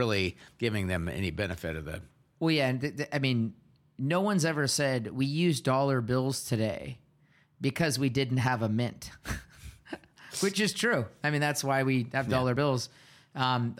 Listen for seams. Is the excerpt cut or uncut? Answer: uncut